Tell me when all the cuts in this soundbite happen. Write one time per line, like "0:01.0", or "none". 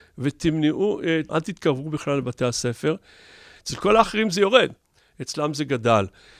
0:01.3
0:03.6